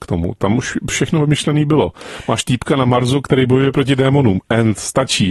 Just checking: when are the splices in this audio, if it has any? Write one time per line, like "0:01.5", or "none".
none

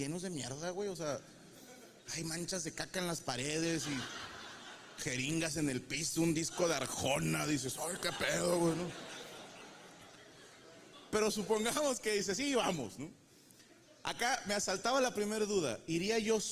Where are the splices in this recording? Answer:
none

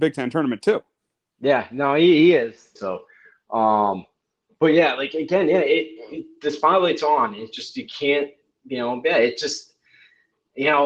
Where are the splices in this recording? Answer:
0:02.8

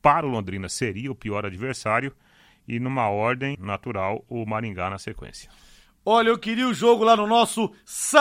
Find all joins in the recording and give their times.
0:03.5

